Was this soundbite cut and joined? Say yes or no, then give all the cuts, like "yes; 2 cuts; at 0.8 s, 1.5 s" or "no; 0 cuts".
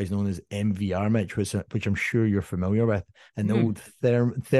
no; 0 cuts